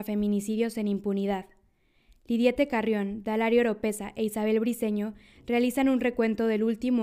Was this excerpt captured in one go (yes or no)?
yes